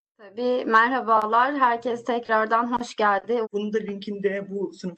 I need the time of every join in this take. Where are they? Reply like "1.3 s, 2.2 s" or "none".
3.4 s